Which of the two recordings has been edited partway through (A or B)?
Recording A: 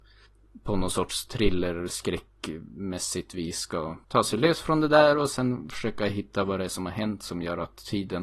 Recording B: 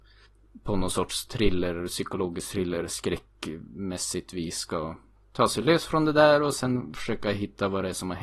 A